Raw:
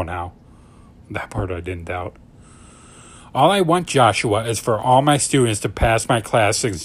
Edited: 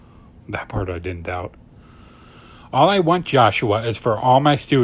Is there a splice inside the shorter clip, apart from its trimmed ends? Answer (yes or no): no